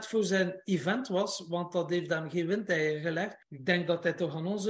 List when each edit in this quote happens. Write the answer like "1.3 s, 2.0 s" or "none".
3.4 s